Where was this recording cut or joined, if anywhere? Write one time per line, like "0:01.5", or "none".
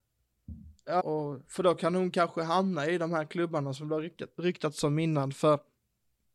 0:01.0